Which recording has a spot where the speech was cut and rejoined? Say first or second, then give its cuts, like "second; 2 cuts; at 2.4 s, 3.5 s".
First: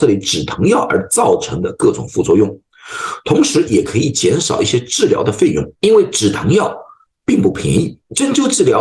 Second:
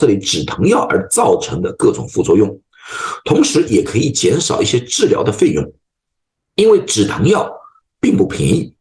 first; 1 cut; at 5.7 s